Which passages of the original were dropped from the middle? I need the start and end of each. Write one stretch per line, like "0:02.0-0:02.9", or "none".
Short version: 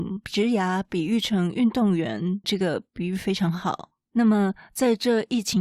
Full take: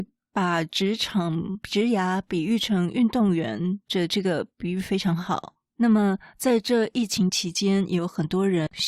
0:03.8-0:04.1